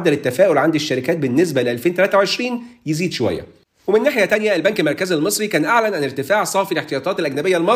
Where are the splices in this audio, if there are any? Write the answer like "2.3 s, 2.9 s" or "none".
none